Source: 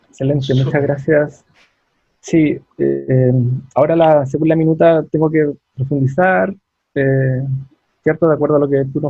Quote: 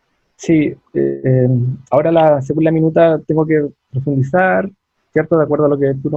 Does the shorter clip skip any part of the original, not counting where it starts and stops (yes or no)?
yes